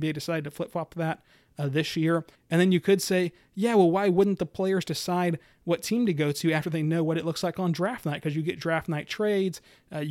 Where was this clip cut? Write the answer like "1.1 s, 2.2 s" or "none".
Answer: 2.3 s